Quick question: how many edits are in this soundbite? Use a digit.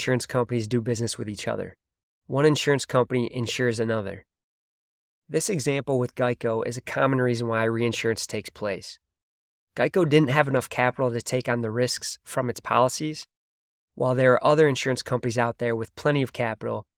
0